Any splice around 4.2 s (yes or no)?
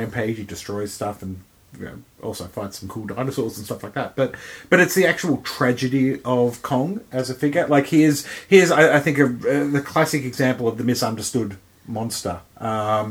no